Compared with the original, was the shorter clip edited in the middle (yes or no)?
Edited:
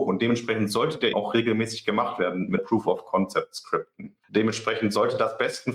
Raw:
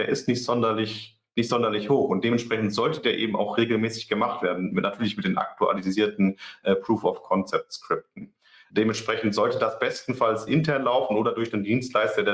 yes